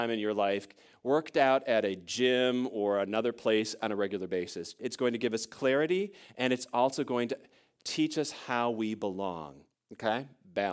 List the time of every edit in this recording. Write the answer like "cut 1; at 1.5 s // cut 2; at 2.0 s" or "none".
cut 1; at 4.8 s // cut 2; at 9.7 s